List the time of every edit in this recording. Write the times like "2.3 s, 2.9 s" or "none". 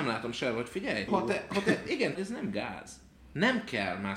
1.1 s, 2.1 s